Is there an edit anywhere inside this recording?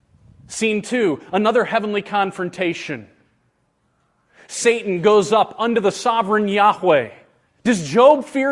yes; 1 cut; at 7.5 s

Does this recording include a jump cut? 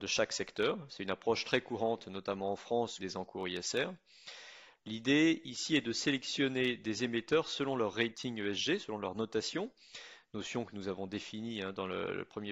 yes; 2 cuts; at 3.0 s, 4.7 s

